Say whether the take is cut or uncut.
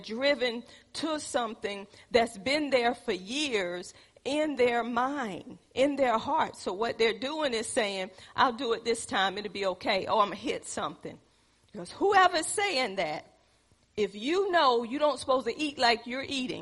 uncut